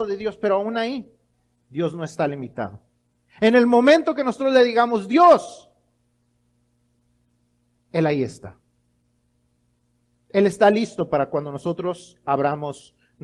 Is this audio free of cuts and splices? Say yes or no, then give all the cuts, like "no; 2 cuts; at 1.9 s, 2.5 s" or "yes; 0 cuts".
yes; 0 cuts